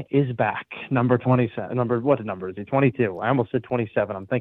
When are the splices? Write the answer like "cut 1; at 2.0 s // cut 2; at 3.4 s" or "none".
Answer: none